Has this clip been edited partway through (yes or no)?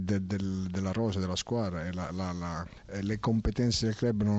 no